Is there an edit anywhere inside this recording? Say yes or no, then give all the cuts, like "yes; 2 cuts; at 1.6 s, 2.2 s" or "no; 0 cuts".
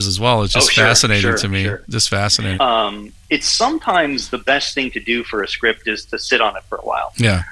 yes; 1 cut; at 2.6 s